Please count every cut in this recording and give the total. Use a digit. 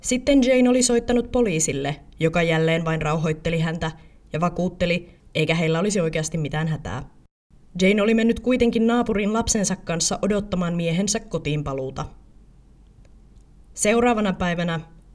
1